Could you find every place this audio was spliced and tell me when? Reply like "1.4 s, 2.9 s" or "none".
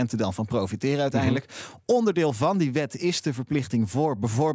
none